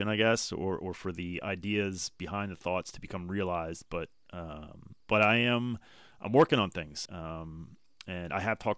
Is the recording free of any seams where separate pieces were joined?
no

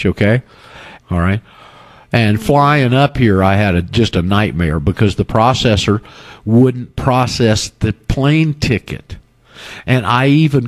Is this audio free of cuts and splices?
no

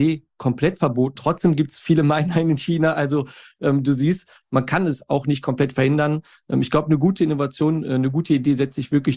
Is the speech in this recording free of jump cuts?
no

